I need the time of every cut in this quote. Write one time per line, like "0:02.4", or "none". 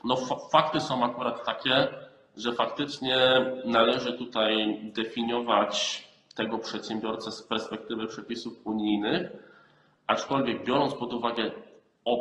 none